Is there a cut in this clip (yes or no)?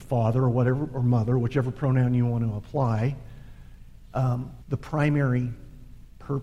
yes